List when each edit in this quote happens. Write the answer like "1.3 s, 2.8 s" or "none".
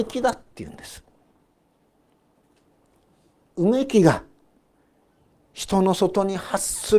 none

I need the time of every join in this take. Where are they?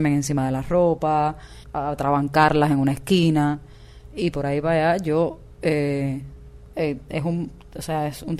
6.7 s

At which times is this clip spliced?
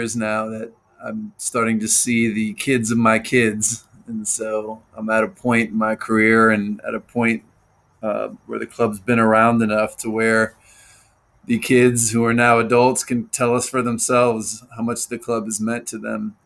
none

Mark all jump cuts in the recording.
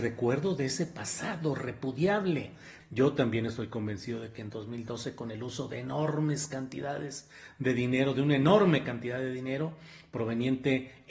2.8 s

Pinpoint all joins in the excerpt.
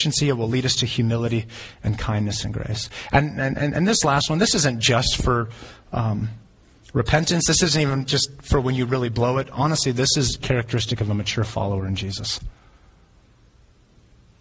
none

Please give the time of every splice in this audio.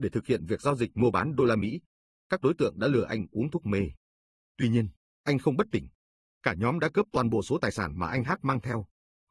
6.3 s

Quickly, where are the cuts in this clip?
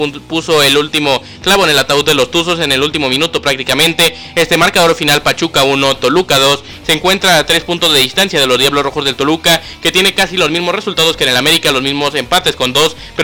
6.8 s

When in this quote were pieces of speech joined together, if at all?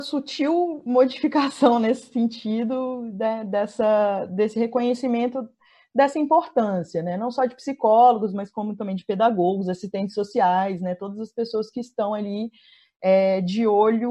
none

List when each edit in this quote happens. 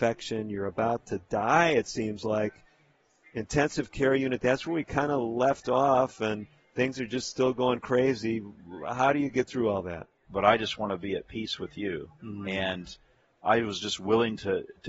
10.2 s

